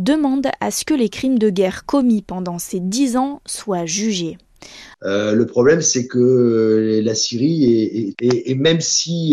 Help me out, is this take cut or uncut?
cut